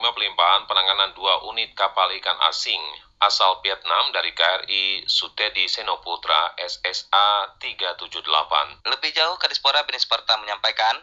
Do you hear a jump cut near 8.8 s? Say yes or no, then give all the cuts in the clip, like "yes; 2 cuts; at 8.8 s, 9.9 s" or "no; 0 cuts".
yes; 1 cut; at 8.8 s